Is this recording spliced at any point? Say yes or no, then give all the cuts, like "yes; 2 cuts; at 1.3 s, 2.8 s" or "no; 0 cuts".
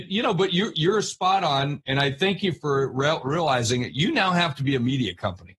no; 0 cuts